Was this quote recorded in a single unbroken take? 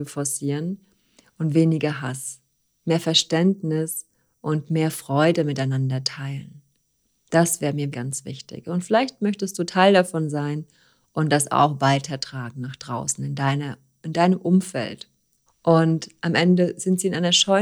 no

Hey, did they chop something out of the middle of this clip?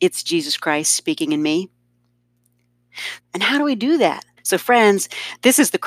yes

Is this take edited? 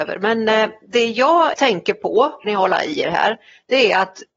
yes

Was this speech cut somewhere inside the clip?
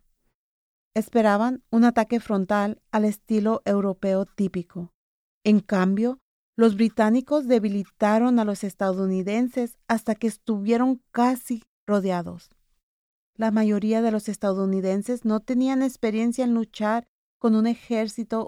no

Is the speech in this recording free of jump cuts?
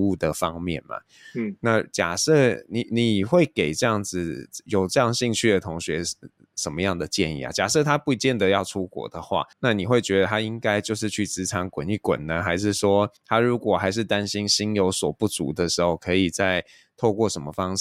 no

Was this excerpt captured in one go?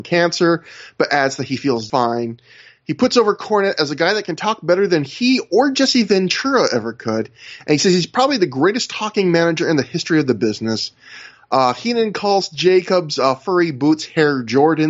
no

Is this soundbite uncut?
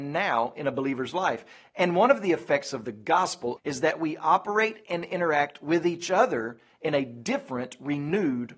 no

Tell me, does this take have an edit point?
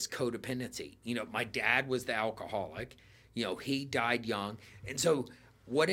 no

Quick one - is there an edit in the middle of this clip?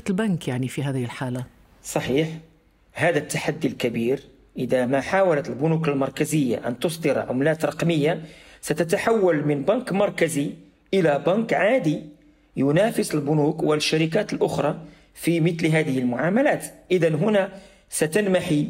no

